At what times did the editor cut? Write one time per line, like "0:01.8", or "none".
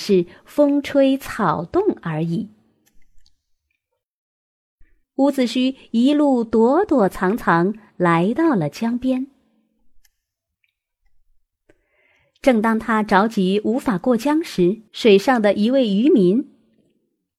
0:05.0
0:14.9